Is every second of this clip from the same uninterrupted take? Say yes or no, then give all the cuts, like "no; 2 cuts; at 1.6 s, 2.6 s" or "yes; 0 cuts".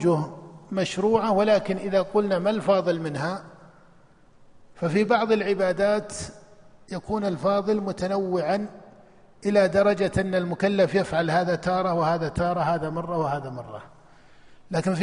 yes; 0 cuts